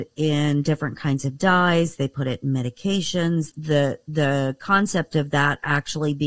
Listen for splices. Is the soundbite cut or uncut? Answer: cut